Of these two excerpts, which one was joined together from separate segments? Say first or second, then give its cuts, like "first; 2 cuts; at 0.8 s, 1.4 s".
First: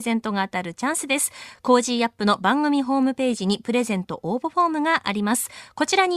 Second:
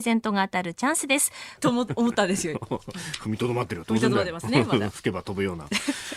second; 1 cut; at 1.6 s